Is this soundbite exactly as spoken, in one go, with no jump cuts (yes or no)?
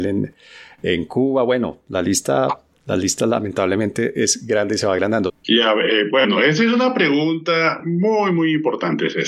no